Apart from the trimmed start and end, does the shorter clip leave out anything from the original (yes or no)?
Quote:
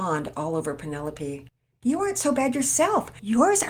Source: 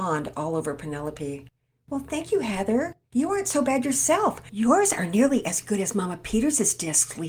yes